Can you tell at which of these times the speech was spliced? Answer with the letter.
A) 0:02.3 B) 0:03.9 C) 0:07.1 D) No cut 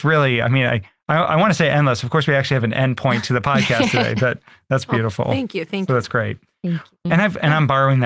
C